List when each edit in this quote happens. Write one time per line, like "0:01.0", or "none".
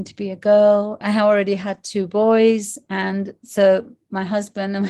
0:01.0